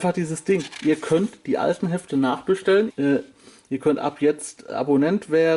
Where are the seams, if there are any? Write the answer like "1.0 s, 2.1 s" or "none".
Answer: 2.9 s